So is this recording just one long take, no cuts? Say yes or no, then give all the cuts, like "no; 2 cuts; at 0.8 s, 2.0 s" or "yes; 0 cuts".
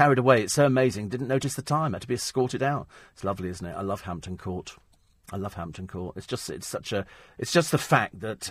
yes; 0 cuts